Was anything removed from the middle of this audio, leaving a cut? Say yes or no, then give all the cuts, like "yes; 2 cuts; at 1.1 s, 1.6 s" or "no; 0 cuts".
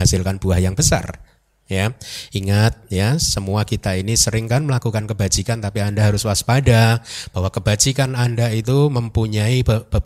no; 0 cuts